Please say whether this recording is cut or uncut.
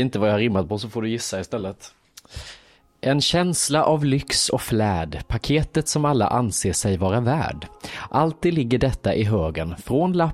uncut